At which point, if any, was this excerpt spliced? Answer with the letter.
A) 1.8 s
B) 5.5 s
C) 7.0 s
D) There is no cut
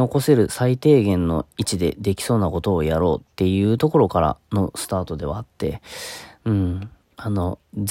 C